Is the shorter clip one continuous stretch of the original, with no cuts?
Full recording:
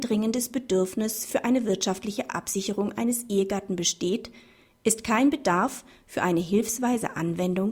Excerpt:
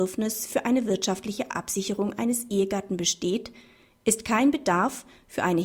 yes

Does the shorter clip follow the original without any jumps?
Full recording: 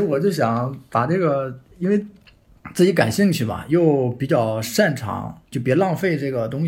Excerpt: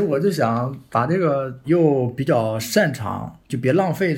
no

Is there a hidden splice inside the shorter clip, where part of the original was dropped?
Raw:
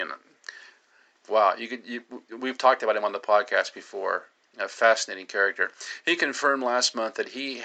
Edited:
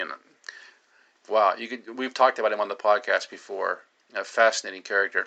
yes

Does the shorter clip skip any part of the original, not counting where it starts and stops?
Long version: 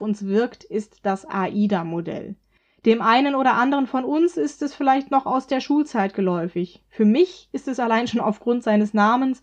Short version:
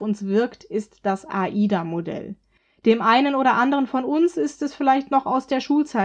no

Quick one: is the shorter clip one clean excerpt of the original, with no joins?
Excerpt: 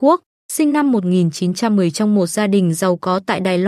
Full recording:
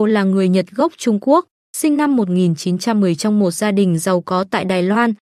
yes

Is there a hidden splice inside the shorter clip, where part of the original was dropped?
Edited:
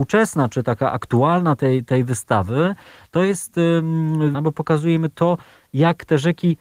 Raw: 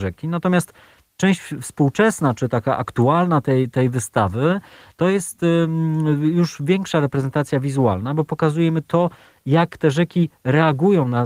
yes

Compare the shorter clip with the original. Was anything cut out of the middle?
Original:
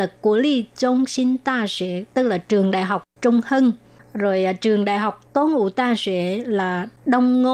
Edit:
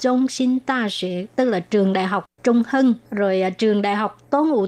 yes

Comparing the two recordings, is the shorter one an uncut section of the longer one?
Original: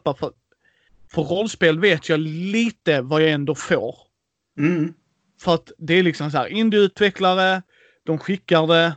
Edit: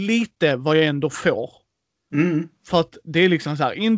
no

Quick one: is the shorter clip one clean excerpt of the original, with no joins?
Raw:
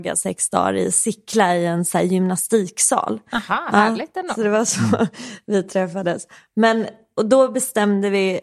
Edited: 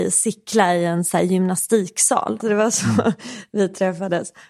no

